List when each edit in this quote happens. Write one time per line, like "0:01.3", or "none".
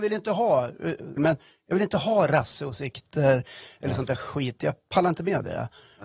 0:01.2